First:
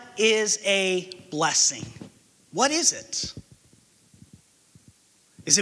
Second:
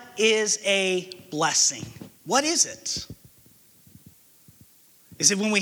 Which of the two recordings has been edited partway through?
second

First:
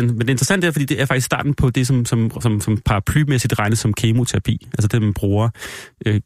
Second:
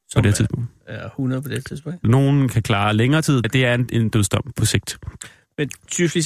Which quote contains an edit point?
second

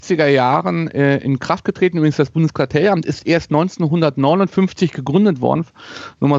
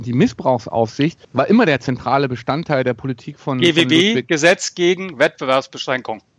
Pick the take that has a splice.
second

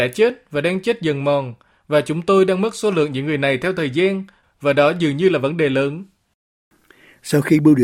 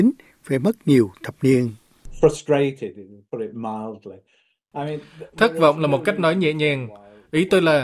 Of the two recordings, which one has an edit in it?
first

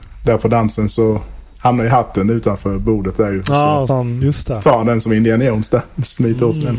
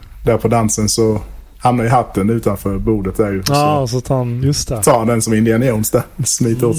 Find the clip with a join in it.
first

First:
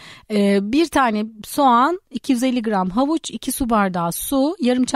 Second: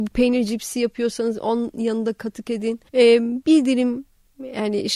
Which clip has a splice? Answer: second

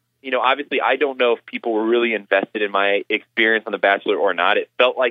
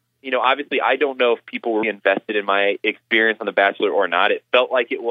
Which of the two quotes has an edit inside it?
second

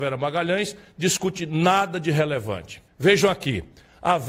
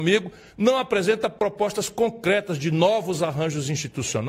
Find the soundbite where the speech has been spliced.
first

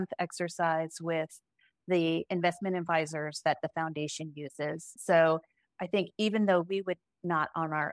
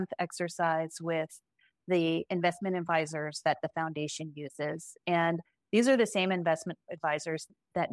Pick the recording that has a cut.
first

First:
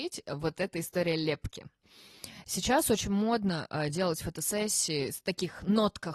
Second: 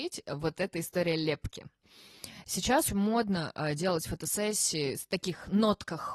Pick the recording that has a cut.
second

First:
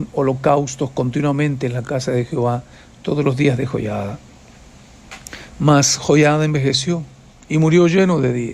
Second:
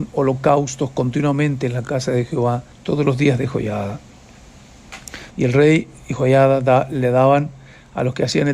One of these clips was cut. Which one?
second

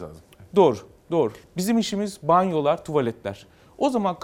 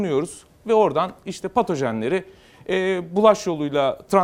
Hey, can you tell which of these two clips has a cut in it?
first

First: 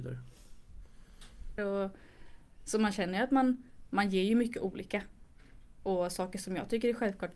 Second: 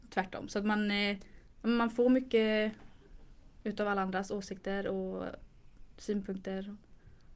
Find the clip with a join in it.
first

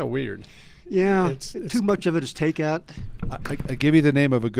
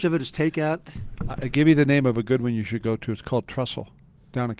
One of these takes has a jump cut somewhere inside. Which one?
second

